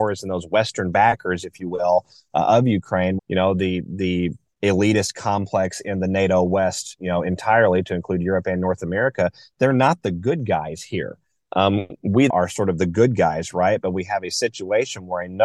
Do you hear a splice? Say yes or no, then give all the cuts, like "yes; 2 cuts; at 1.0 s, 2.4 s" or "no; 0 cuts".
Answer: yes; 2 cuts; at 3.2 s, 12.3 s